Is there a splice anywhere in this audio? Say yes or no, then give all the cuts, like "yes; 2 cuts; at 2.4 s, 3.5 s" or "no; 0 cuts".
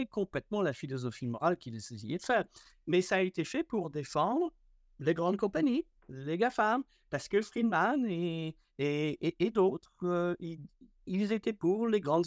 no; 0 cuts